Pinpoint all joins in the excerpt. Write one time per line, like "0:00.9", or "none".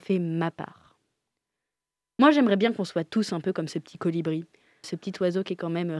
0:04.8